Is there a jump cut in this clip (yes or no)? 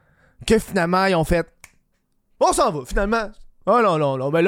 no